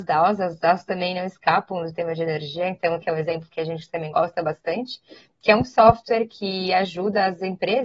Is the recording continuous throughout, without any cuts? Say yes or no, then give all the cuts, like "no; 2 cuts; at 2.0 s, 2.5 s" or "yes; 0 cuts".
no; 1 cut; at 3.0 s